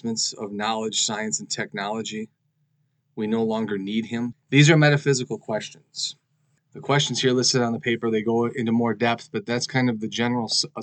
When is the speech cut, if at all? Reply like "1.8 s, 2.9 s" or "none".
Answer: 4.3 s